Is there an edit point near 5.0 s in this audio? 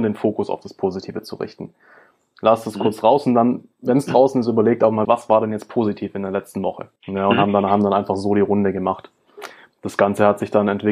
yes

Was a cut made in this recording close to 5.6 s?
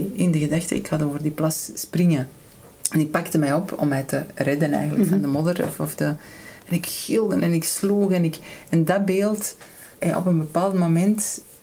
no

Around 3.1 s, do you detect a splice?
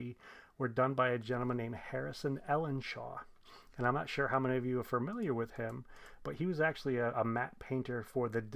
no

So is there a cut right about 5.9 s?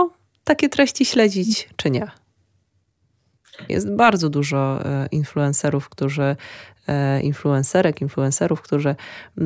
no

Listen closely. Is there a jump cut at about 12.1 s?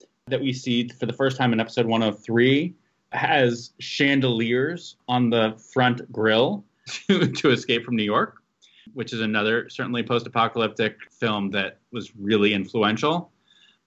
no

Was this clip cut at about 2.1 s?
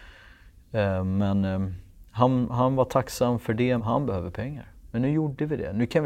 no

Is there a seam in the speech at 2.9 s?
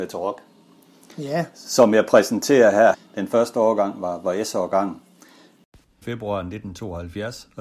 yes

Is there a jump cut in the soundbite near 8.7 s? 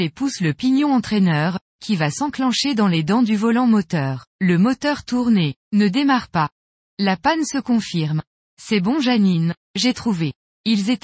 no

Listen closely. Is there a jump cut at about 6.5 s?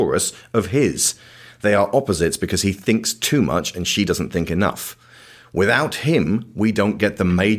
no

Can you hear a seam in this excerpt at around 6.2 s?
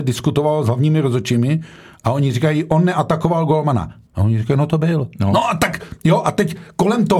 no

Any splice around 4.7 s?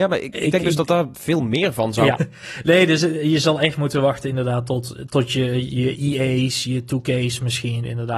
no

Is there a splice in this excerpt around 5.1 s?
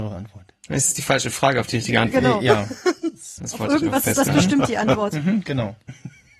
no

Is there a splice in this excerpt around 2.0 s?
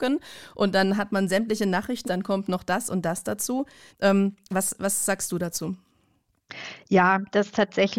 yes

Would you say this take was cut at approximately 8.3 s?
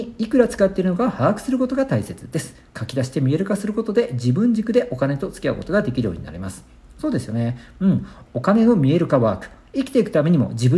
yes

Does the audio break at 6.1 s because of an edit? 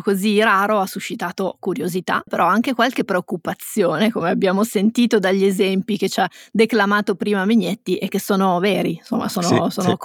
no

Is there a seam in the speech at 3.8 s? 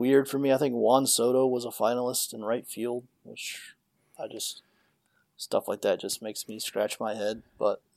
no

